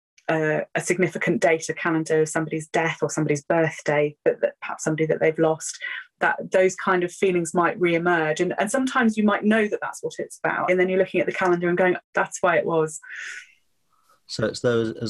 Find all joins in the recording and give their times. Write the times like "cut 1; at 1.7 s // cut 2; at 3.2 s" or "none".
cut 1; at 10.7 s // cut 2; at 12.0 s